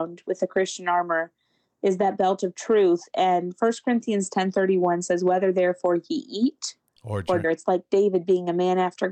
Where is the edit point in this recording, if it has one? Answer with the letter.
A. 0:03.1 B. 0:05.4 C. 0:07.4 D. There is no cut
C